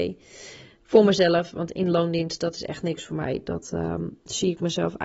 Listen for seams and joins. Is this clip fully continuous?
yes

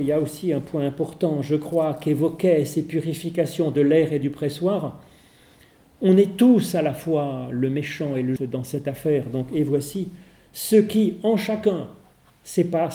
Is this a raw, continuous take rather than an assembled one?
no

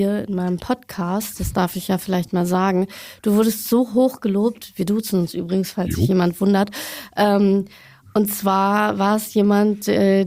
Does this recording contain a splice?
no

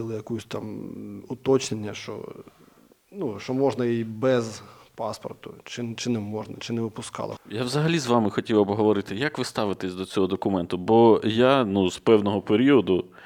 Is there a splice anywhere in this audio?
yes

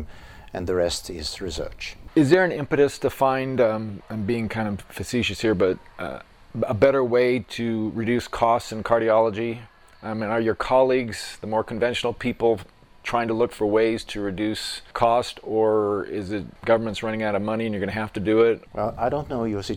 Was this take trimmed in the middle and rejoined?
no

